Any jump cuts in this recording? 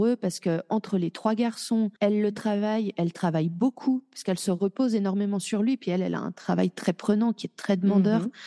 yes; 1 cut; at 2.0 s

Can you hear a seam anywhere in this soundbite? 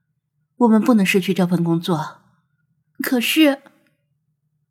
yes; 1 cut; at 3.0 s

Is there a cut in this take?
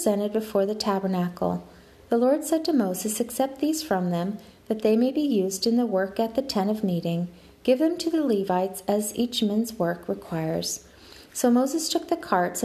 no; 0 cuts

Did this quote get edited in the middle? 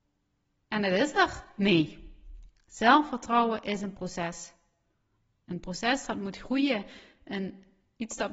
no; 0 cuts

